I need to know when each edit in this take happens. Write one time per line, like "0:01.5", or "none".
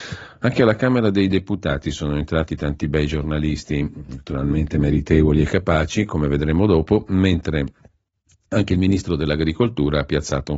none

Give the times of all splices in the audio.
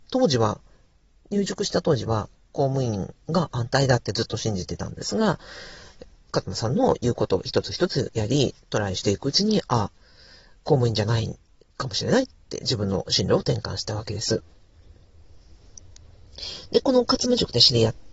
none

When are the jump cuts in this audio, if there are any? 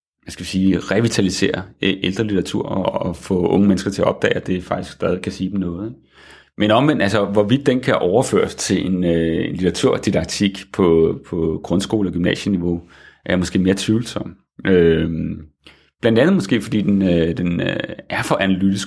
0:06.4

